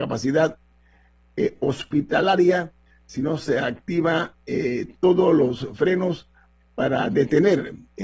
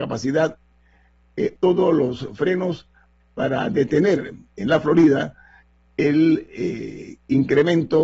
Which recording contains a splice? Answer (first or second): second